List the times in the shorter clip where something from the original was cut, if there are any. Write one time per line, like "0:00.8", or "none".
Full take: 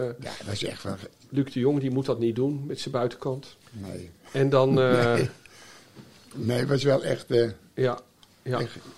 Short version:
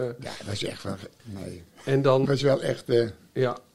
0:01.2
0:02.2